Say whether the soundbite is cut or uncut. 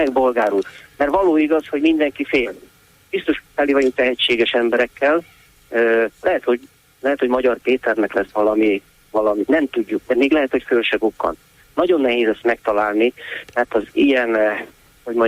uncut